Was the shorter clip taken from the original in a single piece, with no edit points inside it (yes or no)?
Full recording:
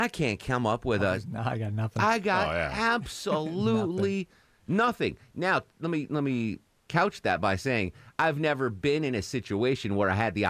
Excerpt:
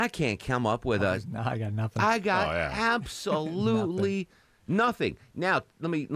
yes